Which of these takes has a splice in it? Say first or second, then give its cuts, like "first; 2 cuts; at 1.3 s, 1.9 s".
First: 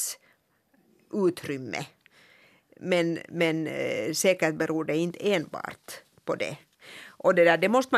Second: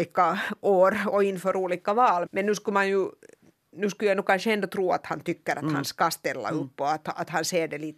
second; 1 cut; at 2.3 s